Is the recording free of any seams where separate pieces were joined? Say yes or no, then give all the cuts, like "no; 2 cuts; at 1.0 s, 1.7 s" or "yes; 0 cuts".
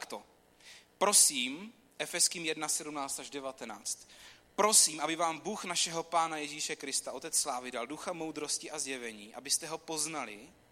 yes; 0 cuts